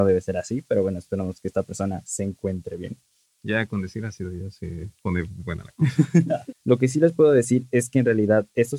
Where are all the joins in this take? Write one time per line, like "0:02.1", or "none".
0:03.3
0:06.5